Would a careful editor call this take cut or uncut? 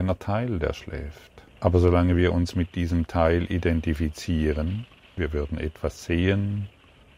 cut